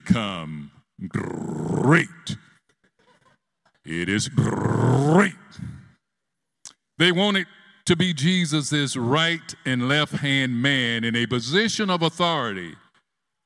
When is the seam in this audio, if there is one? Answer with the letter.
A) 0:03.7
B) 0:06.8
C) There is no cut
A